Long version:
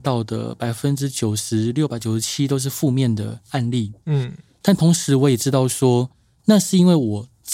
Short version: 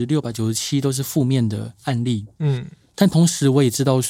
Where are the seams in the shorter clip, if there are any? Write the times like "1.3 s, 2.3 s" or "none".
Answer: none